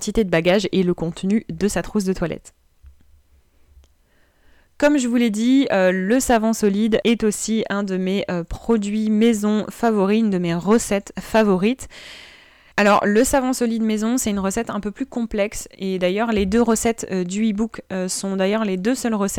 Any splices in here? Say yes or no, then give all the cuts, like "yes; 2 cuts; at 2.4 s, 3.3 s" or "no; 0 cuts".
no; 0 cuts